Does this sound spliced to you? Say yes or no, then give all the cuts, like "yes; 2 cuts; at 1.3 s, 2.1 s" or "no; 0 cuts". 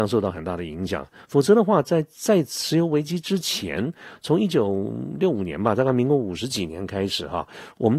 no; 0 cuts